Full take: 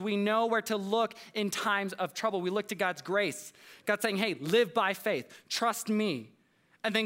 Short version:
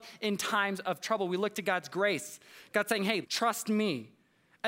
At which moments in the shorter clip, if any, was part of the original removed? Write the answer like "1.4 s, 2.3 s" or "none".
3.2 s